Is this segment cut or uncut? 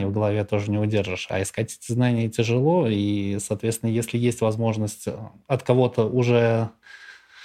uncut